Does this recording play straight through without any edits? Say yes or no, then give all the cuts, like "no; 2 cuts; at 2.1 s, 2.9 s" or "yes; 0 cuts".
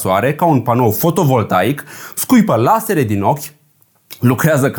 yes; 0 cuts